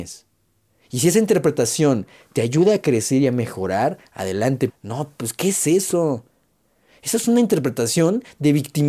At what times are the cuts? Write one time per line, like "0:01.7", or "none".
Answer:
0:04.7